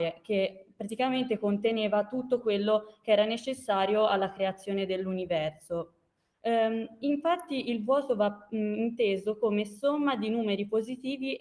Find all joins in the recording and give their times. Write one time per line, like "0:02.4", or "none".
0:06.3